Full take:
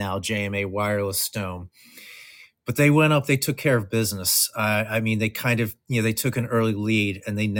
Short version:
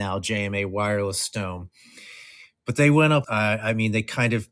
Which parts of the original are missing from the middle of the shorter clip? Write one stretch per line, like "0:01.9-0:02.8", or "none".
0:03.2-0:04.5